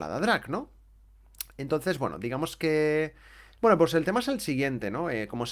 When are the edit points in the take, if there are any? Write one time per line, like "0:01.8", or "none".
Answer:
0:03.6